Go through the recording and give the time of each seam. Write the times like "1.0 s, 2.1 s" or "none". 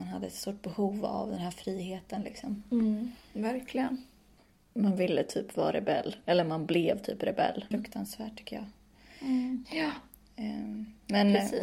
7.7 s, 9.6 s